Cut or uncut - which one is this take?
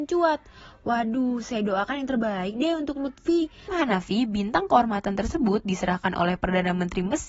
cut